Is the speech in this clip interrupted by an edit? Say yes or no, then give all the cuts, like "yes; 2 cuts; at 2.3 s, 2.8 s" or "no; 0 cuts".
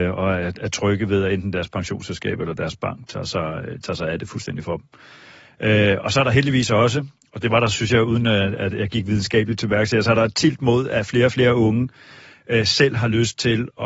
no; 0 cuts